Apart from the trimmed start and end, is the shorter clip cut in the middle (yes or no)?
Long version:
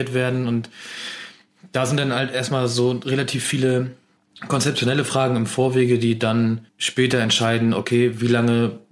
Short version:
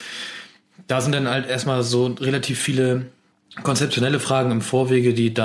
no